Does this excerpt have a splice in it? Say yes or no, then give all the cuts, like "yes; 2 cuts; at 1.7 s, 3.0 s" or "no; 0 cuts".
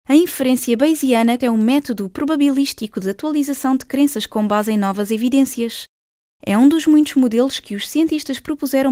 yes; 1 cut; at 1.4 s